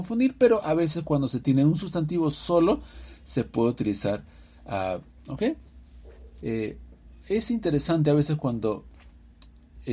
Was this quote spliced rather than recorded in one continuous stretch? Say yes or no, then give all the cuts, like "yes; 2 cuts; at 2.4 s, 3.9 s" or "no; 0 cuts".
yes; 2 cuts; at 5.2 s, 6.4 s